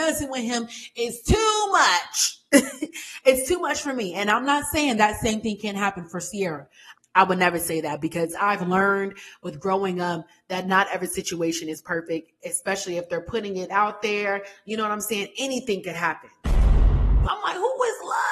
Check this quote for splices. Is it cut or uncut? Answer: cut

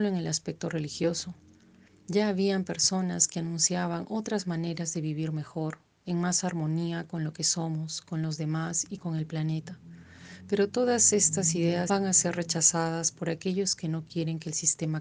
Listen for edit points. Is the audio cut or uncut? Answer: cut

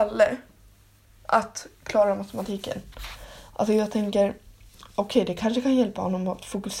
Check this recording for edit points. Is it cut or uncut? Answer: uncut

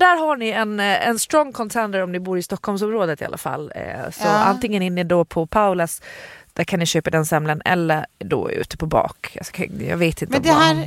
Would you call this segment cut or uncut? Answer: uncut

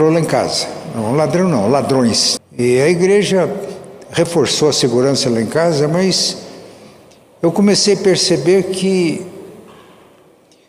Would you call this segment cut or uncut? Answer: cut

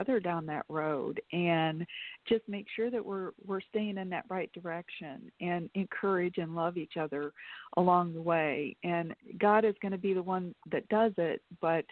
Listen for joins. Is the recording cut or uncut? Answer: uncut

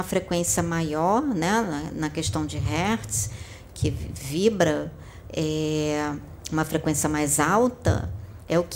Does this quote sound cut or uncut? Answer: cut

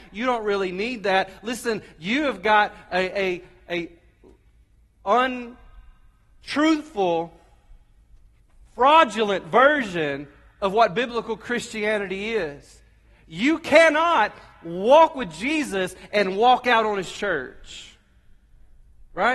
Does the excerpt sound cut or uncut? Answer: uncut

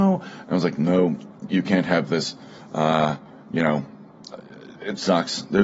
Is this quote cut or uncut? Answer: uncut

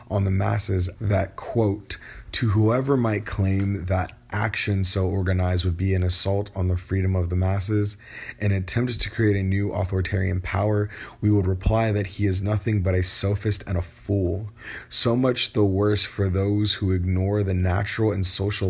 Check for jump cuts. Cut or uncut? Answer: cut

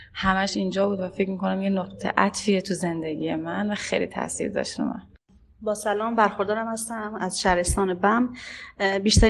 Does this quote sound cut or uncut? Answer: uncut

